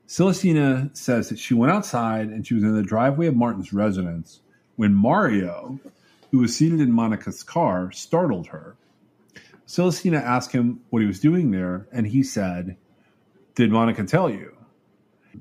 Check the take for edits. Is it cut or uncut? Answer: uncut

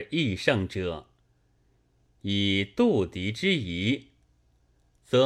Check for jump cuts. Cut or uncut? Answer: uncut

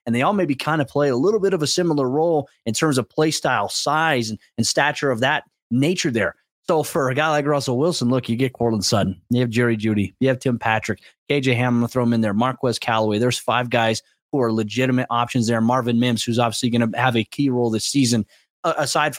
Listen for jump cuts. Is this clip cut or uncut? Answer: uncut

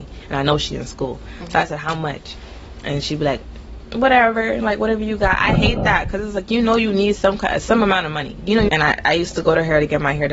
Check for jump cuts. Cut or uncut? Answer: cut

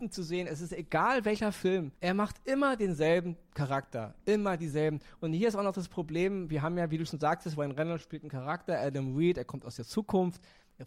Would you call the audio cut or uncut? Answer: uncut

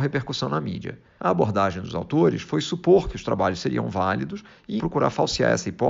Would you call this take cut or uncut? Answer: cut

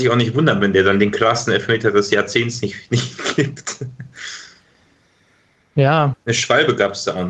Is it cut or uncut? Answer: cut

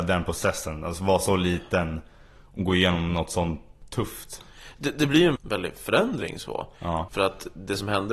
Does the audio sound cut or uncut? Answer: cut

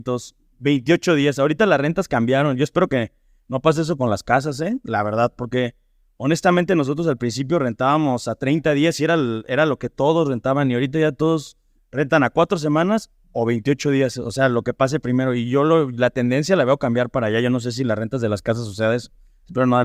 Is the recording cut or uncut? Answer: uncut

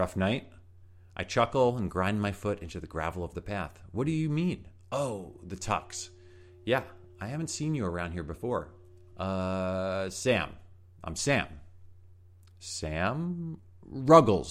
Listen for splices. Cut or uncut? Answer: cut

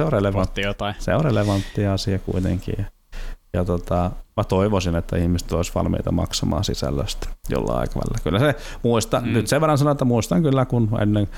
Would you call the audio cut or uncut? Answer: cut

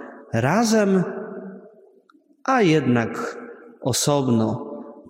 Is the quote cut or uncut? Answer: uncut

